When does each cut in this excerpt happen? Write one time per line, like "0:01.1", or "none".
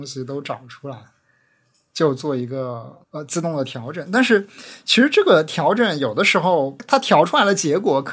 0:03.0